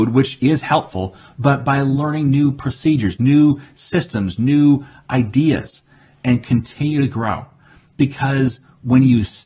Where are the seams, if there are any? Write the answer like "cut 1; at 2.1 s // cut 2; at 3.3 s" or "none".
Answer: cut 1; at 3.2 s